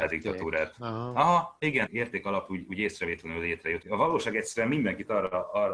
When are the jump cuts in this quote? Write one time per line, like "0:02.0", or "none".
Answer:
0:01.9
0:03.8